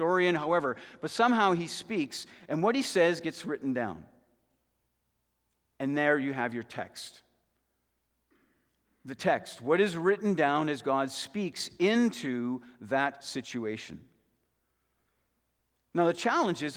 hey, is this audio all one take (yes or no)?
yes